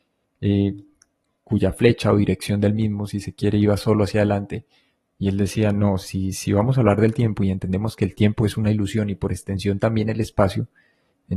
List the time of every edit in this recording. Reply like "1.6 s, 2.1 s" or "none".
none